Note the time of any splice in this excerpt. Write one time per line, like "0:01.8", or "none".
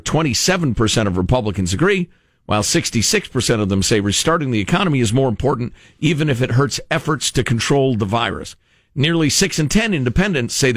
none